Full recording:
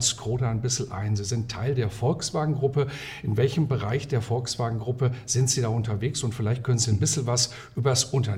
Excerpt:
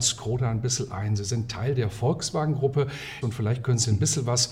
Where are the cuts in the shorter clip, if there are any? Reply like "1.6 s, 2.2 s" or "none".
3.2 s